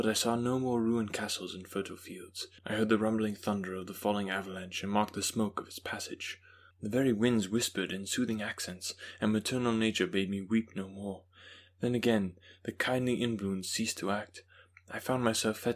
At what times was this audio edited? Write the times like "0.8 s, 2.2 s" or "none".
2.6 s, 6.7 s